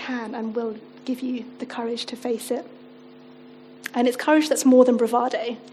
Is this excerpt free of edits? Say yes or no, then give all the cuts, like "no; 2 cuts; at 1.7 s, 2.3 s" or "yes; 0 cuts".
yes; 0 cuts